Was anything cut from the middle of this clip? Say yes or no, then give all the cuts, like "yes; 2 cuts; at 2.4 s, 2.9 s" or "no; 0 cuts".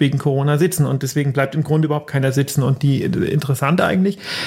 no; 0 cuts